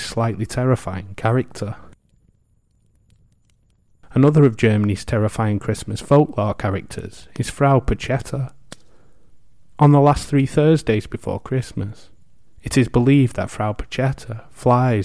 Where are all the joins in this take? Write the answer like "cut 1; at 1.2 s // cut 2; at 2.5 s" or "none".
none